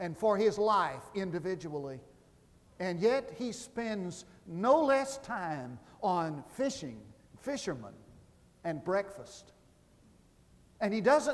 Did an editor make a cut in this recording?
no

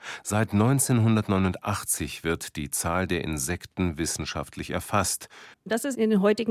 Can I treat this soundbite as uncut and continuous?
no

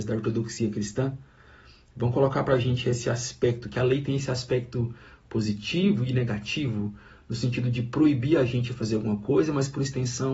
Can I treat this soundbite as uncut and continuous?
yes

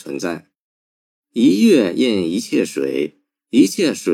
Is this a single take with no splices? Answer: yes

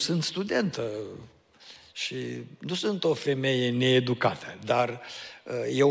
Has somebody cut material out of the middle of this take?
no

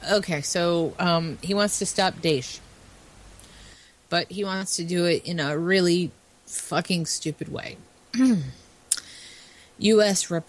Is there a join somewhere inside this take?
no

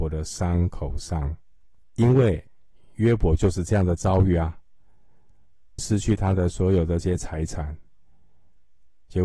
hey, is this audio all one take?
no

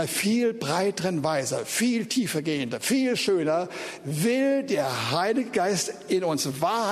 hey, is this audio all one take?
yes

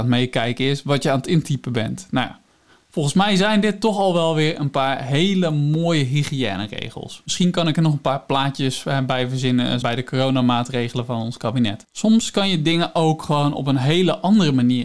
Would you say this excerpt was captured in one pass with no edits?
no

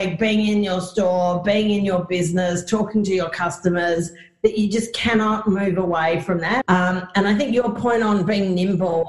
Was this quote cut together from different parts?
yes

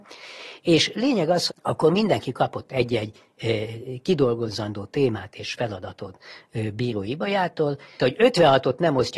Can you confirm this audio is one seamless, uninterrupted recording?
no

